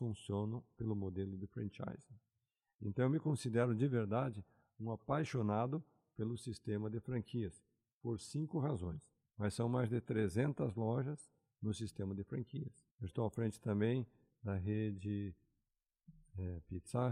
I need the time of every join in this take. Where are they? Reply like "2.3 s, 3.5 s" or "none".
9.3 s, 12.9 s